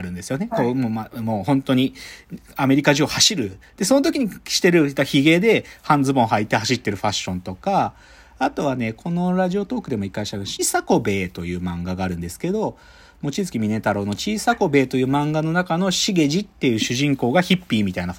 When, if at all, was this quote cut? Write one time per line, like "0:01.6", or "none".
0:10.6